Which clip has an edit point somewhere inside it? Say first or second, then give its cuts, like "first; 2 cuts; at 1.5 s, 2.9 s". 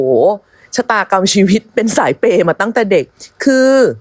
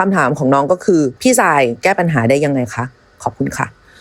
second; 1 cut; at 1.2 s